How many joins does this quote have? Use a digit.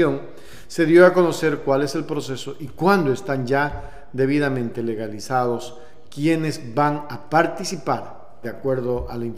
1